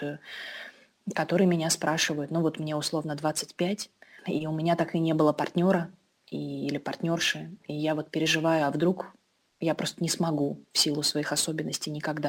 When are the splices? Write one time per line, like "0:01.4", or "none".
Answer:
none